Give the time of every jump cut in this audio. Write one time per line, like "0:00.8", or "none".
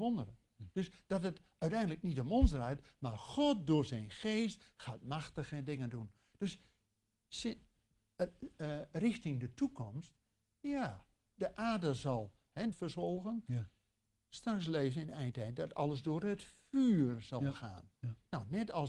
0:12.7